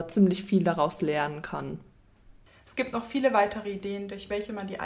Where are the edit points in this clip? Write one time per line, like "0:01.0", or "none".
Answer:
none